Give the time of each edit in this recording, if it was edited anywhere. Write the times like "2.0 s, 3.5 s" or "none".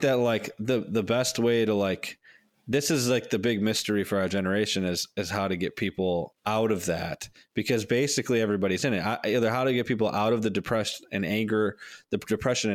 6.4 s